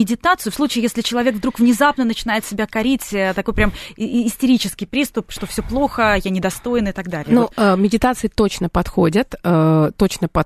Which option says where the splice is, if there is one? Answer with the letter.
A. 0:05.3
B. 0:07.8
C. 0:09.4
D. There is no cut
D